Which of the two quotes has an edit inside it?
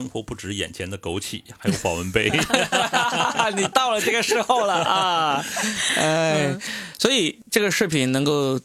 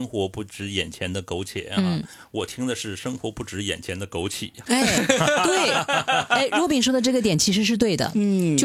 second; 1 cut; at 4.7 s

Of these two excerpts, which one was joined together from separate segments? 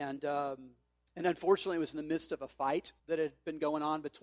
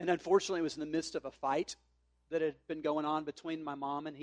first; 1 cut; at 3.0 s

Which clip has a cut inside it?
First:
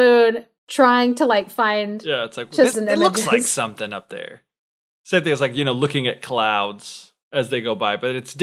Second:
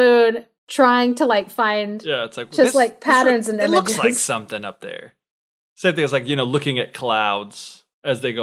first; 1 cut; at 2.7 s

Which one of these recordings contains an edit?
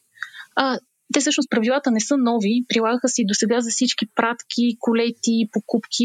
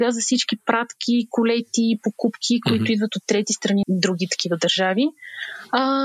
second; 1 cut; at 3.8 s

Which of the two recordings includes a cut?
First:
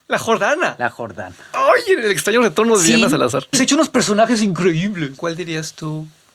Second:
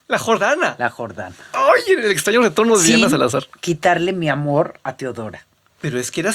first; 1 cut; at 3.5 s

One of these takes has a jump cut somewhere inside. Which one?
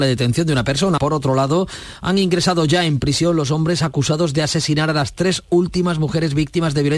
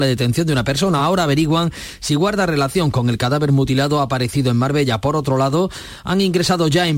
first; 1 cut; at 1.0 s

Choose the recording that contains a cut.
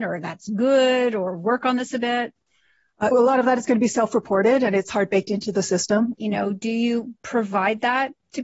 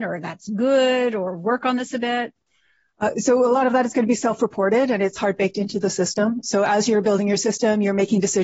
first; 2 cuts; at 3.1 s, 6.1 s

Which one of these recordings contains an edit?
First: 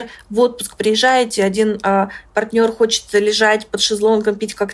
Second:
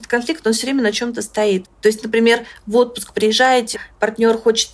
second; 2 cuts; at 1.6 s, 3.7 s

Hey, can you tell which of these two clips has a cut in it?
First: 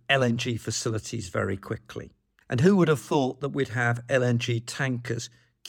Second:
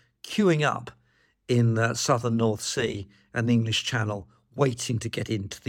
first; 1 cut; at 2.4 s

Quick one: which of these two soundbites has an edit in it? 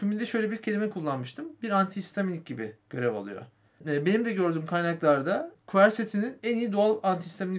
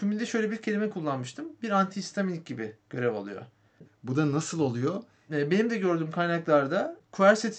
second; 2 cuts; at 3.8 s, 5.3 s

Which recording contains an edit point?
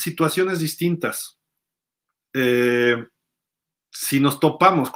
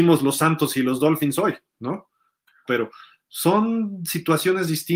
second; 1 cut; at 2.7 s

